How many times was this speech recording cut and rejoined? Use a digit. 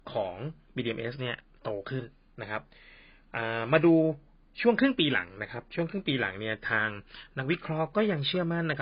0